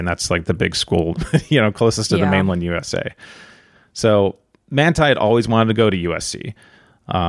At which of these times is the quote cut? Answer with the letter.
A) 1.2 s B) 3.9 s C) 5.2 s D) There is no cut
A